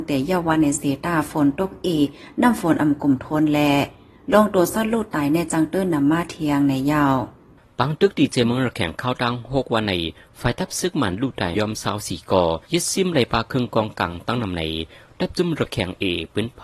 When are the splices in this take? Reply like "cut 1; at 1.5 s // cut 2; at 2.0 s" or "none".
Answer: cut 1; at 11.5 s // cut 2; at 12.6 s